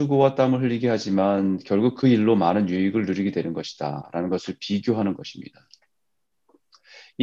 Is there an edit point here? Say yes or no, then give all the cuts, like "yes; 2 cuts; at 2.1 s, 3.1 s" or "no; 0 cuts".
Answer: no; 0 cuts